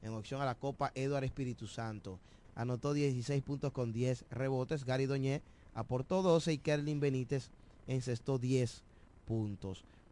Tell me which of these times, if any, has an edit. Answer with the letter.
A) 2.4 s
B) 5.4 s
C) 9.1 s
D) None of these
A